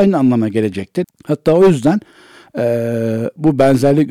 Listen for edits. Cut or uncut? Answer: cut